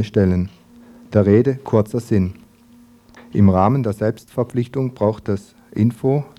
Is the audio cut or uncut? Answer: cut